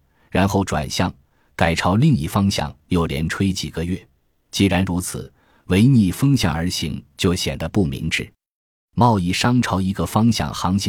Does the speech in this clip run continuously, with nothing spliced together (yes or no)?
yes